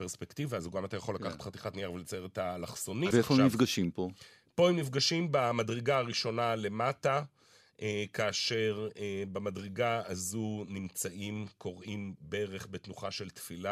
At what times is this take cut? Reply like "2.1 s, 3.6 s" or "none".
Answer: 3.1 s